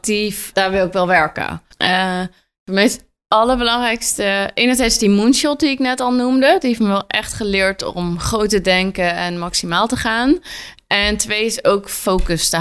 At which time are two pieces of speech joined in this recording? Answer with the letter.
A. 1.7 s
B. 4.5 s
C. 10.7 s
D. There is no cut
A